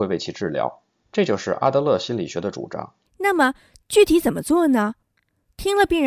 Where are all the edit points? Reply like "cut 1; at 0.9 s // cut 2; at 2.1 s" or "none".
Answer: cut 1; at 1.0 s